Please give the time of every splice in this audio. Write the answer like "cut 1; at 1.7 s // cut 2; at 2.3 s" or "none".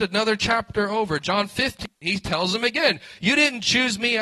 none